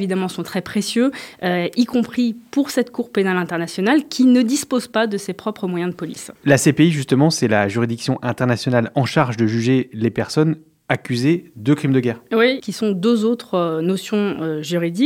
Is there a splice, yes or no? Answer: yes